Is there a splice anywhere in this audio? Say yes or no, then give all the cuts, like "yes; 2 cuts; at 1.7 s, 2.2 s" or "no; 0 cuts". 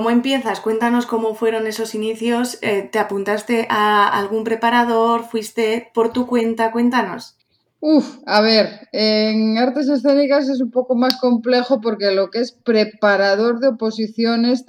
no; 0 cuts